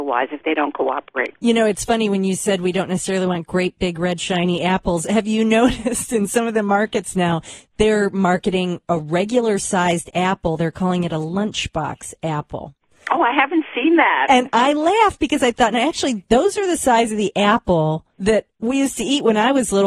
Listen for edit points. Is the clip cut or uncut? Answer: cut